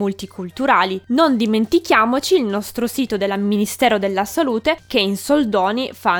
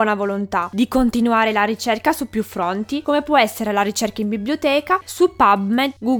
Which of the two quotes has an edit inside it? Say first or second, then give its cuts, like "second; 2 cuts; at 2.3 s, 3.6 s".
second; 1 cut; at 5.0 s